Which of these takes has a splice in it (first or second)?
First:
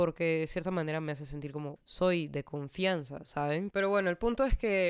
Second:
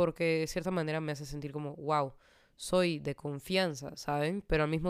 first